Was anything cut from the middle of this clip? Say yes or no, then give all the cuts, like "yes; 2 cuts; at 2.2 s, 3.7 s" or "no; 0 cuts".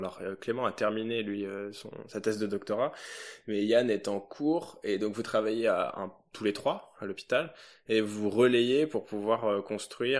no; 0 cuts